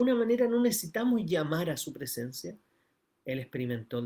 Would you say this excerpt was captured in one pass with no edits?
no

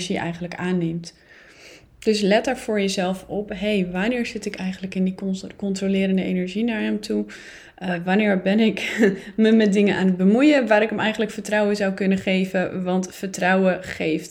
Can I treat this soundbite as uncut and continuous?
yes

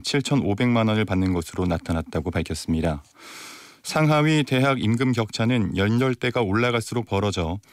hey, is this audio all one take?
yes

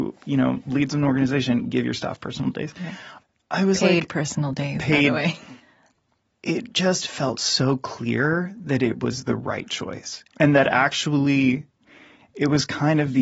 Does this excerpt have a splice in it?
no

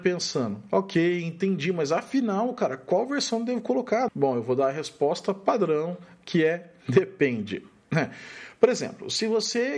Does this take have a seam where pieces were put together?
yes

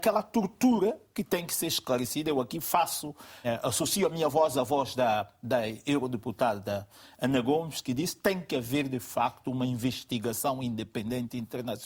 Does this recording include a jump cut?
yes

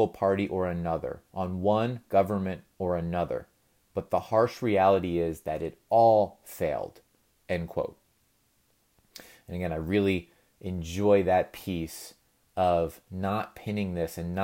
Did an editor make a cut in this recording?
yes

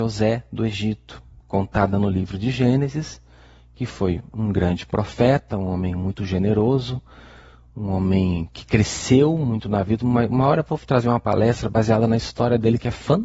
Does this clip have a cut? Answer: no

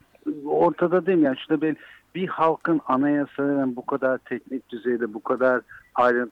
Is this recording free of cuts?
yes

